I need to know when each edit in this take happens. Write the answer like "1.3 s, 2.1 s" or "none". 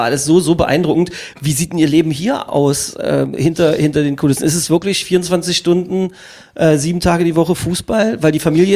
none